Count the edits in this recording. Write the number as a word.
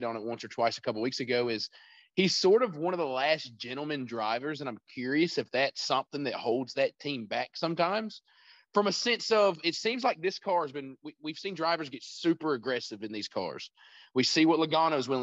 zero